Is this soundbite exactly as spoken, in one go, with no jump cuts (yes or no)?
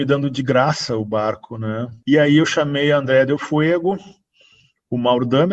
no